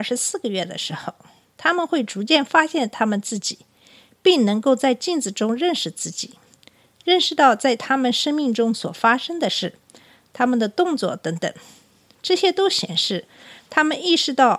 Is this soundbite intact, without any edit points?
yes; 0 cuts

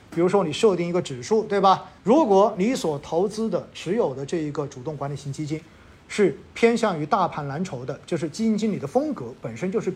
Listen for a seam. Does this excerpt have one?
yes; 1 cut; at 2.0 s

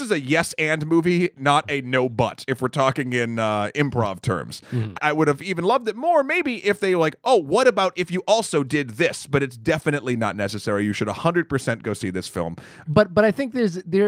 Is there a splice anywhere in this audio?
yes; 2 cuts; at 4.9 s, 12.8 s

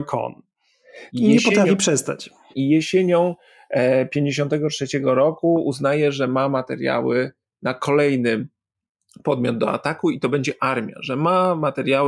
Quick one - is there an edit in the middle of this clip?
yes; 2 cuts; at 1.1 s, 2.5 s

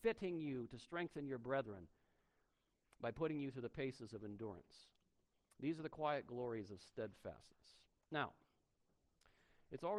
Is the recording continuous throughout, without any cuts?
yes; 0 cuts

